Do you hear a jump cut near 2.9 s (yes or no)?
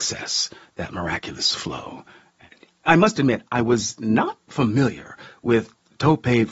yes